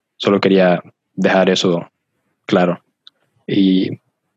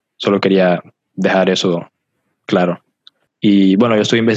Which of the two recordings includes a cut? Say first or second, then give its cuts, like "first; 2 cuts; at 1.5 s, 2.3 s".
second; 1 cut; at 3.3 s